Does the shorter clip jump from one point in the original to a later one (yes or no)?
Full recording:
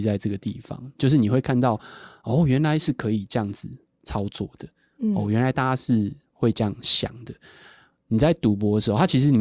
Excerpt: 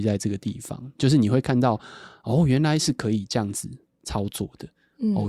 no